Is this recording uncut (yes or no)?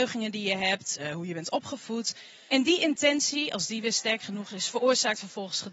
no